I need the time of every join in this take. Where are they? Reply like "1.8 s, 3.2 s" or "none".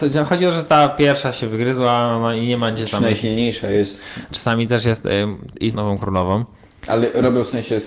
4.3 s, 5.7 s